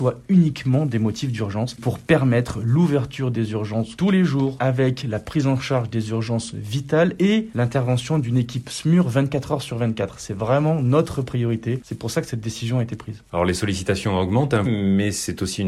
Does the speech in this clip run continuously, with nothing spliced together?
no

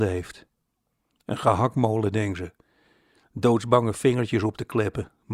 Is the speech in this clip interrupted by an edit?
no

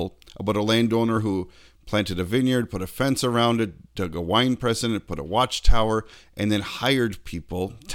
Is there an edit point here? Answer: no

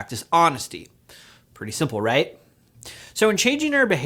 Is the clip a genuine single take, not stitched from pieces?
yes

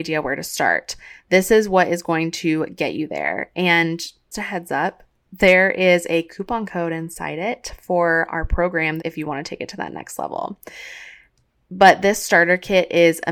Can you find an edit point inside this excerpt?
yes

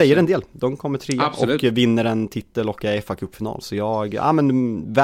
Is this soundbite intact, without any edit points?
yes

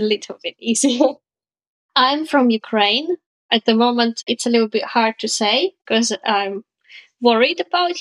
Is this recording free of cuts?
yes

